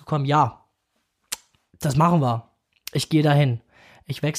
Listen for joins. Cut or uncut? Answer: uncut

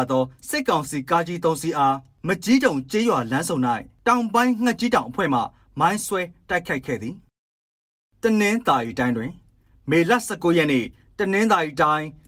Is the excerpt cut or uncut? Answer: uncut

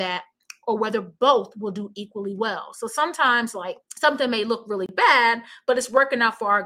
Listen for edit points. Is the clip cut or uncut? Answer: cut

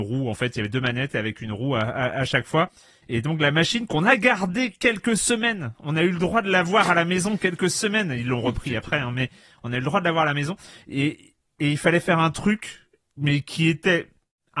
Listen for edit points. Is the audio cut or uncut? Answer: uncut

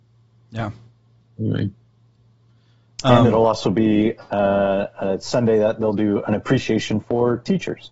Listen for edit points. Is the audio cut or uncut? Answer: uncut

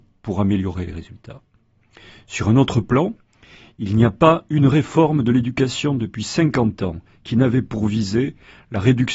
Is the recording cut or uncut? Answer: uncut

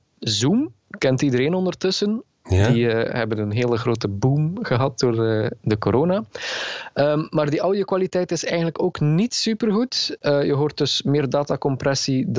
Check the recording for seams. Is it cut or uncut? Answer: cut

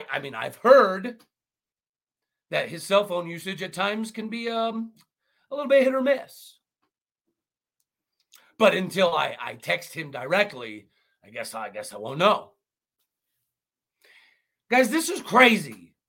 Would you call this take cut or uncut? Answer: uncut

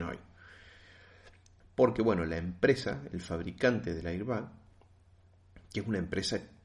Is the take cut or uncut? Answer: cut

